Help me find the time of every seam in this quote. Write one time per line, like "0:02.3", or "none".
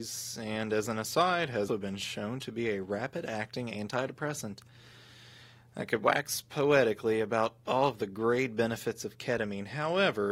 0:01.7